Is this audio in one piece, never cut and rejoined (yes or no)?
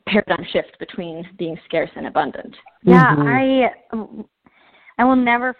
no